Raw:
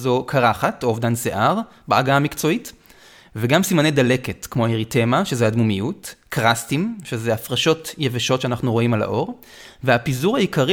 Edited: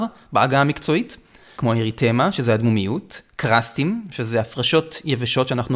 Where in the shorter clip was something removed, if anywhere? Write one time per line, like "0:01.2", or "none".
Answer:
0:01.5